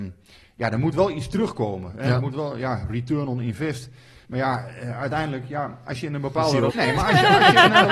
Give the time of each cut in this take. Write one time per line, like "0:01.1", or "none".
0:04.2
0:06.7